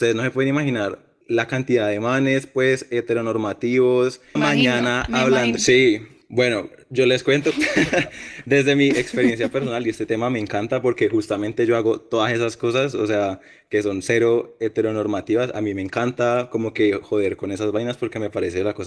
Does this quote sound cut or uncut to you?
cut